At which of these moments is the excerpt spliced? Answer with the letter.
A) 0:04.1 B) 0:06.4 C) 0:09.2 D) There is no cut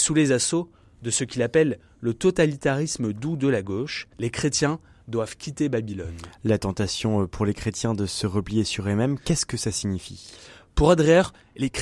A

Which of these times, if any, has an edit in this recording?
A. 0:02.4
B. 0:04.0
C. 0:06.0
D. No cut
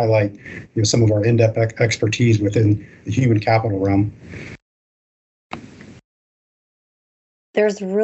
D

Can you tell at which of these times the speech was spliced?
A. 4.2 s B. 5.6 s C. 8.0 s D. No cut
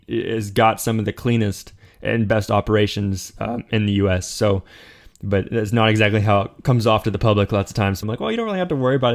C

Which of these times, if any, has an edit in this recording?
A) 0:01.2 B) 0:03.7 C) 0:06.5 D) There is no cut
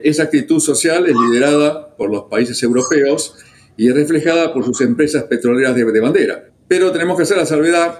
C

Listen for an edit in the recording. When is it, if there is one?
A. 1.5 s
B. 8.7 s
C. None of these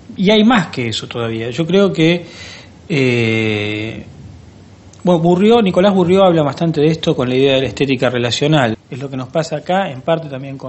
B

